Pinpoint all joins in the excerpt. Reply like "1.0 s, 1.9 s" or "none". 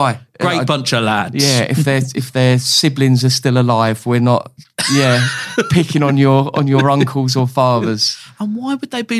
none